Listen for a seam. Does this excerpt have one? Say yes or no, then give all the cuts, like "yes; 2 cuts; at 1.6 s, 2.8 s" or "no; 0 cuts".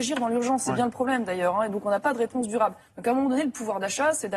no; 0 cuts